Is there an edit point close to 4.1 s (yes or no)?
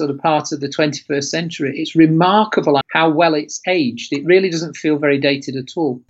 no